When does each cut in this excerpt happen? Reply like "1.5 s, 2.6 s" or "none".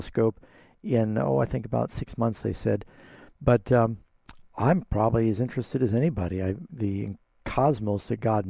6.7 s